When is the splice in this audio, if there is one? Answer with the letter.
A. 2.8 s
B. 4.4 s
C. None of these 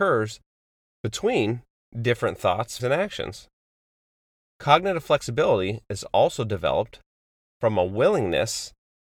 A